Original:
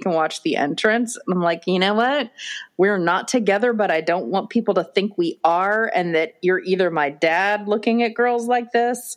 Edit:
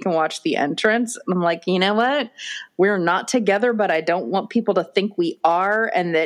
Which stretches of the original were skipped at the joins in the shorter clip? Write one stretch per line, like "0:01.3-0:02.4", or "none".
none